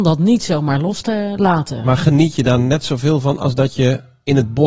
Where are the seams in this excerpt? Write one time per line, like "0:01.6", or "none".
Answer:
none

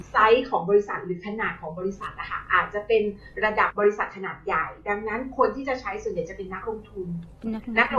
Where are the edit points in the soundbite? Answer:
0:03.7

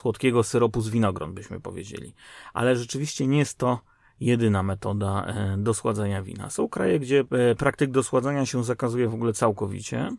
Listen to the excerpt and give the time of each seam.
none

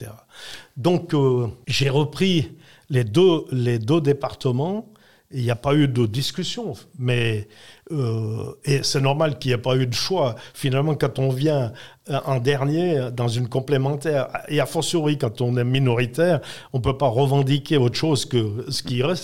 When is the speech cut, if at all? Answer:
none

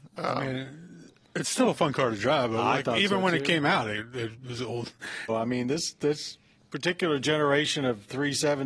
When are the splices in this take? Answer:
0:05.3

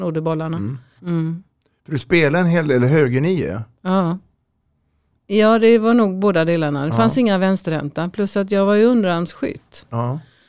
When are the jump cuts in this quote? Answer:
0:01.0
0:05.1

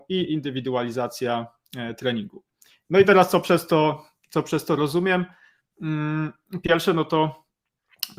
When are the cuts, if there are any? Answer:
none

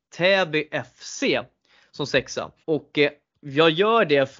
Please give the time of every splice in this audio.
0:02.6

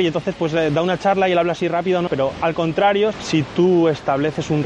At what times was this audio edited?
0:02.1
0:03.1

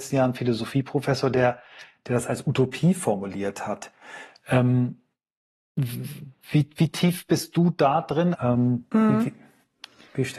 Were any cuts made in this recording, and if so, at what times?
0:08.3

